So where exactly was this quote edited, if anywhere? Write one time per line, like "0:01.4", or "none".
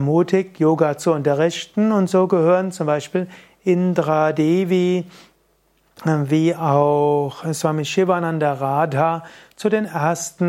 none